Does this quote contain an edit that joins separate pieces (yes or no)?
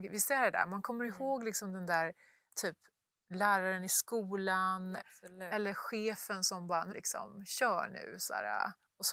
yes